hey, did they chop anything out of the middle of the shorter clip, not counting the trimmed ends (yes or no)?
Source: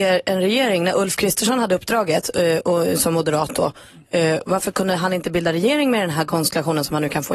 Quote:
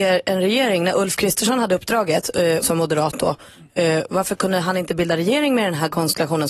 yes